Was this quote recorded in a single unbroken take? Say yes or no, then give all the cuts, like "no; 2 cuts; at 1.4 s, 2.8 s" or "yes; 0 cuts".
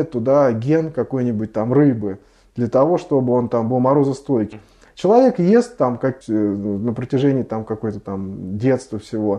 no; 2 cuts; at 4.5 s, 6.2 s